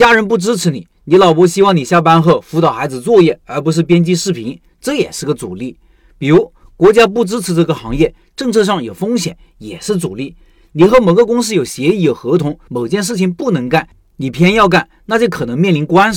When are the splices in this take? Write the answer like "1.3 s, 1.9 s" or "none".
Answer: none

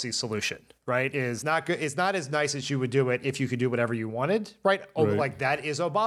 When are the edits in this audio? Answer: none

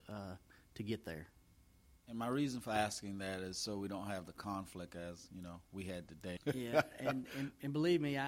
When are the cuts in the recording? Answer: 6.4 s

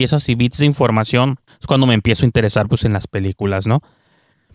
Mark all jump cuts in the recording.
none

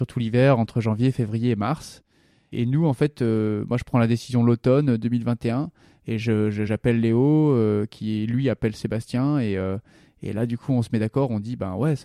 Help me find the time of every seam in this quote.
none

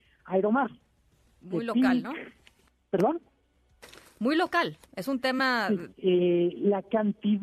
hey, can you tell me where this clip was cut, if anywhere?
1.4 s, 5.9 s

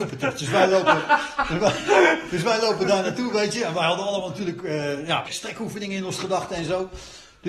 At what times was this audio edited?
2.3 s, 5.2 s

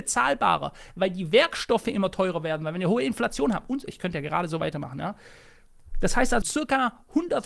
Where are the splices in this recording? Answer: 6.4 s

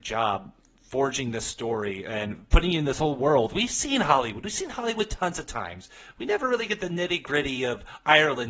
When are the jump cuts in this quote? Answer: none

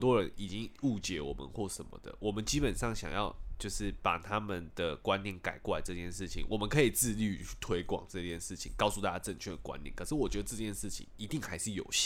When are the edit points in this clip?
none

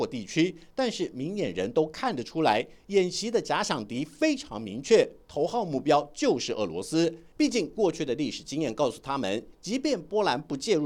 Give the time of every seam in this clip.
7.3 s, 9.5 s

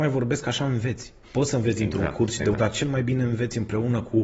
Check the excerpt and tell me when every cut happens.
1.2 s, 2.5 s

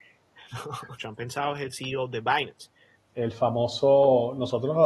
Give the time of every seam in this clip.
1.0 s, 2.9 s

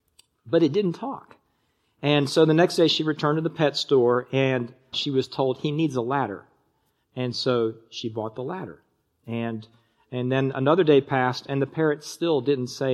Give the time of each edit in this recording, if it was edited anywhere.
4.9 s

